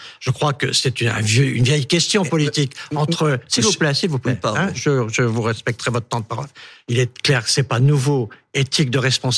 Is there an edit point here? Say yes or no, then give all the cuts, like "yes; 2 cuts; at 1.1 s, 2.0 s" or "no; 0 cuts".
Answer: no; 0 cuts